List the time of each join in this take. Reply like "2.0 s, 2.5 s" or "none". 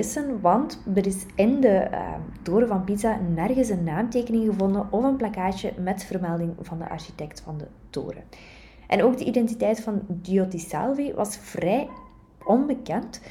none